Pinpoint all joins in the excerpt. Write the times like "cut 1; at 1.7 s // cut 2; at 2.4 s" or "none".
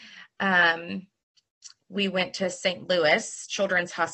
cut 1; at 1.8 s